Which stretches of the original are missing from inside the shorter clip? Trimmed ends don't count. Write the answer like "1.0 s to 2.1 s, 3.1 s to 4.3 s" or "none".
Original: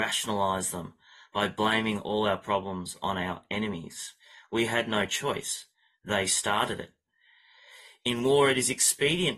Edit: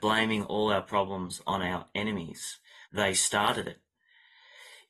4.4 s to 6.0 s

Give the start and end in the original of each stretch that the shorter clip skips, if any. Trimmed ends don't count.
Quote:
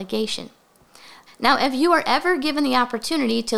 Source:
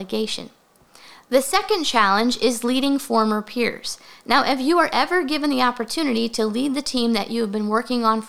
1.3 s to 4.1 s

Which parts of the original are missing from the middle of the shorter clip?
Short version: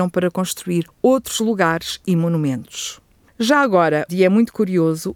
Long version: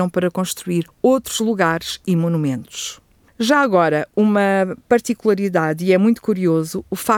4.1 s to 5.8 s

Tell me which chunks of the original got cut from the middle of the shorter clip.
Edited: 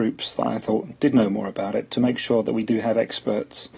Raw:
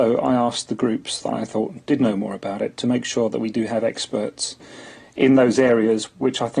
none

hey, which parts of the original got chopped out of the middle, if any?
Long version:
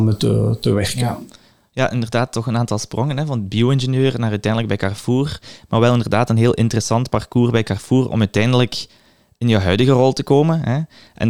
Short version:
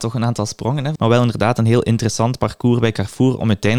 3.3 s to 5.7 s

